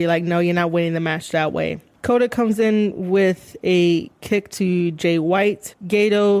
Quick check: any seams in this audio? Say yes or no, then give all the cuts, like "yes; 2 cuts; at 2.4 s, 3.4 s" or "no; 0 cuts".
no; 0 cuts